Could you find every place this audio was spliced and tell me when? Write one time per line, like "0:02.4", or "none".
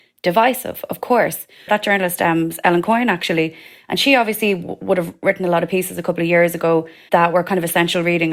0:01.7
0:07.1